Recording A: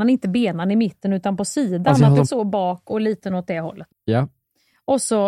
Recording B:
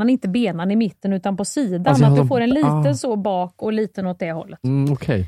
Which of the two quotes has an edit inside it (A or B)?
A